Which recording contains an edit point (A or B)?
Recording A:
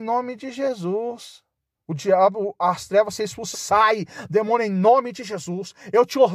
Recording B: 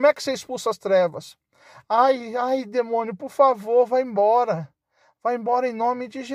A